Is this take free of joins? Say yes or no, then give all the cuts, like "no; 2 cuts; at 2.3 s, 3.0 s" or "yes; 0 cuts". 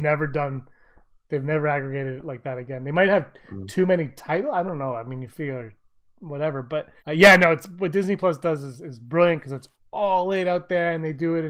no; 1 cut; at 7.0 s